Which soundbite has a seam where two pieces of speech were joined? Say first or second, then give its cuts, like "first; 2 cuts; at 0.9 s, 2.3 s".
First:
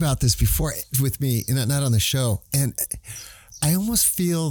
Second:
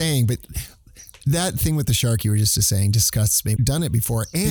second; 1 cut; at 3.6 s